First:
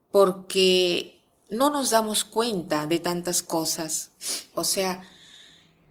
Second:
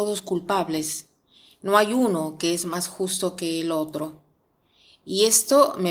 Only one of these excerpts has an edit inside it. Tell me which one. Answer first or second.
first